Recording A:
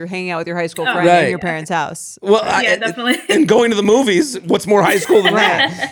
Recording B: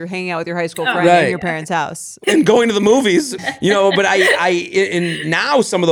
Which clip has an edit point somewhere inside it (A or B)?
B